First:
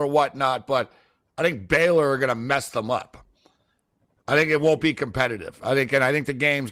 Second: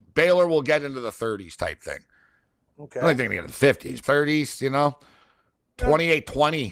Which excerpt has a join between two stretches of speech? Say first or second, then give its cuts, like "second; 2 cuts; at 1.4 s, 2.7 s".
second; 1 cut; at 4.0 s